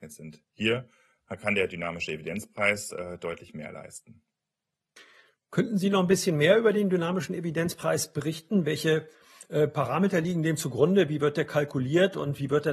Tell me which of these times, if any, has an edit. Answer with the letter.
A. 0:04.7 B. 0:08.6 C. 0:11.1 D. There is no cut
D